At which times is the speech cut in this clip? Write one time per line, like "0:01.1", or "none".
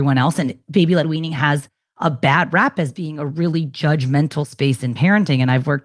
none